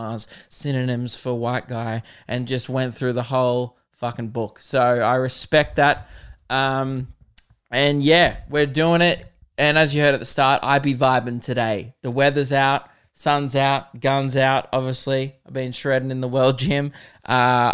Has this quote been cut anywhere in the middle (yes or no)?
no